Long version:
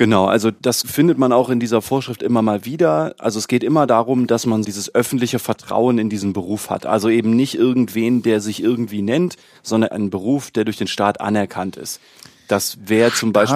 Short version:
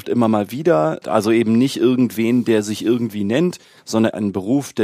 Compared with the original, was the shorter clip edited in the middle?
yes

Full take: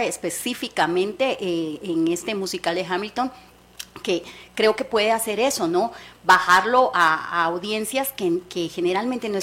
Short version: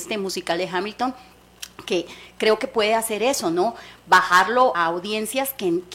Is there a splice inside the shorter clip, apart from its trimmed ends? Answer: yes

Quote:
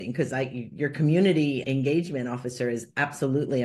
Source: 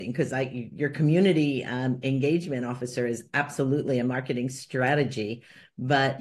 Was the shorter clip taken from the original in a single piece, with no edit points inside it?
no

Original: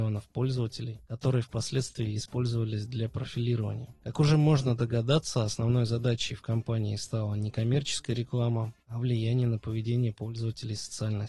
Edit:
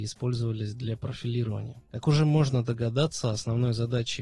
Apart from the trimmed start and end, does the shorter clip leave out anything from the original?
no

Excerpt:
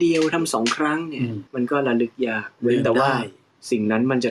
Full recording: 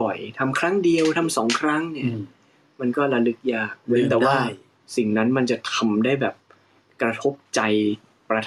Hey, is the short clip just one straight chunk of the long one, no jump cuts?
no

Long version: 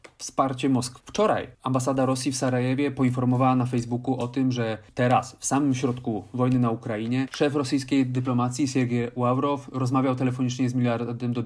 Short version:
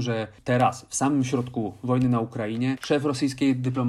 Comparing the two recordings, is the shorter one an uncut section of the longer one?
yes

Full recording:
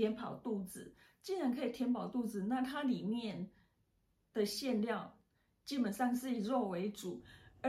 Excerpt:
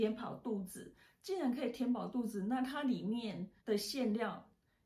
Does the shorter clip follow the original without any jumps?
no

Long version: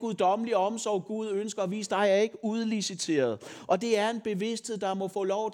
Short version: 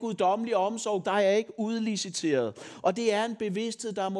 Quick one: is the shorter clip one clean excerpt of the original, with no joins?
no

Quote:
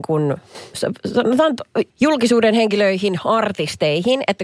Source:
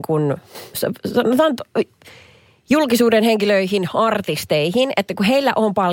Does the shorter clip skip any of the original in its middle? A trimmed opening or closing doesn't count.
yes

